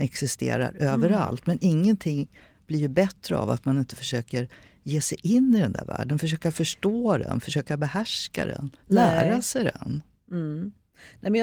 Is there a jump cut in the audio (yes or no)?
no